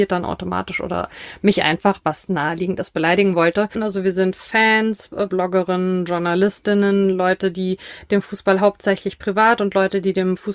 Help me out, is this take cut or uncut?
cut